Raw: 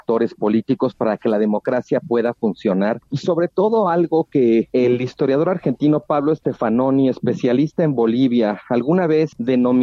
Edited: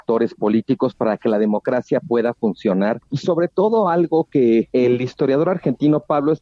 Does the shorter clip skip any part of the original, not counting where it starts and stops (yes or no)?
no